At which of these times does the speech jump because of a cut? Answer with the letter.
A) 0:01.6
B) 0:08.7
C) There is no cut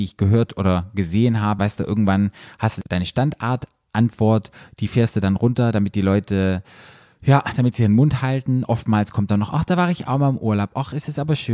A